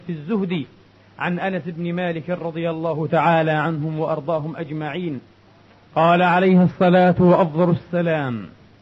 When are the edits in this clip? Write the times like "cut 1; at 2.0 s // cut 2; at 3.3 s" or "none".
cut 1; at 5.9 s